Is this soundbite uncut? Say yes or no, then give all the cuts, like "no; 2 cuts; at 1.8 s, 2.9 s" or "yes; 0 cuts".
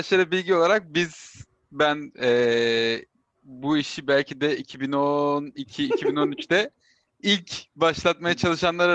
yes; 0 cuts